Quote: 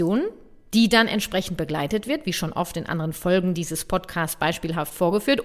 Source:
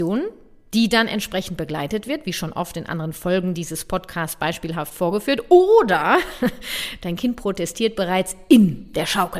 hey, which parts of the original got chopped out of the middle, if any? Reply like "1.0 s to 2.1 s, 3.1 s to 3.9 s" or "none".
none